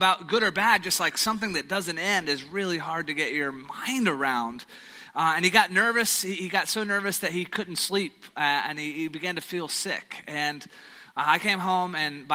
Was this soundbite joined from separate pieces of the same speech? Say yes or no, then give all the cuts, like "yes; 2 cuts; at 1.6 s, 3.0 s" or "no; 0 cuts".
no; 0 cuts